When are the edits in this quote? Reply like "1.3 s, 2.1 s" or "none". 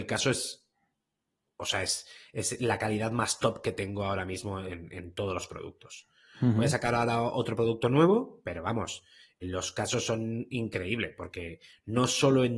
9.4 s